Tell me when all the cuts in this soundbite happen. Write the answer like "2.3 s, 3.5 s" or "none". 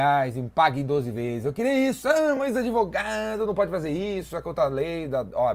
none